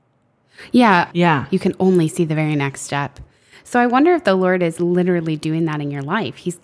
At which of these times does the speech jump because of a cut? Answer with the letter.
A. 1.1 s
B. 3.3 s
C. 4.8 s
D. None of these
A